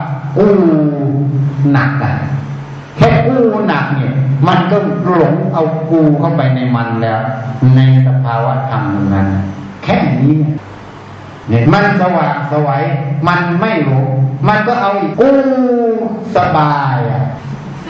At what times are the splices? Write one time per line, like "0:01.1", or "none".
0:11.6
0:15.1